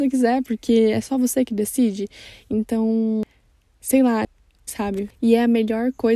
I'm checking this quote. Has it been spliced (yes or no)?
yes